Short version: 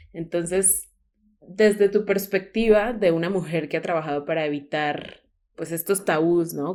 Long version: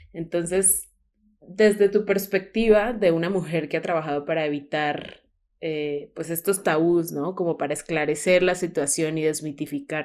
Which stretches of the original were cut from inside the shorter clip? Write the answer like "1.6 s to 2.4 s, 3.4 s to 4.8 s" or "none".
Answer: 5.5 s to 6.1 s